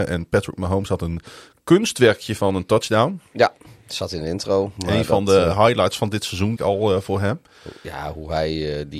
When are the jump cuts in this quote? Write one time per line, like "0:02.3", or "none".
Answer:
0:06.6